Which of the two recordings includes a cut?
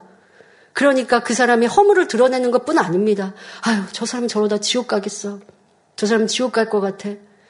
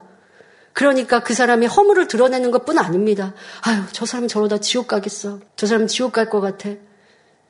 second; 1 cut; at 5.5 s

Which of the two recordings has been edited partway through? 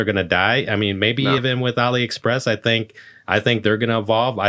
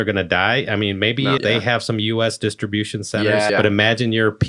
second; 2 cuts; at 1.4 s, 3.5 s

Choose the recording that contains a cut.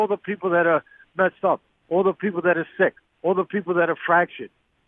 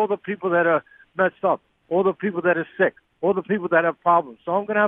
second; 1 cut; at 3.1 s

